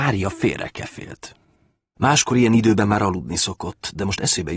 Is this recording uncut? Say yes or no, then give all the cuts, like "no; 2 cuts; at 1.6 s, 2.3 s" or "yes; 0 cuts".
no; 1 cut; at 2.0 s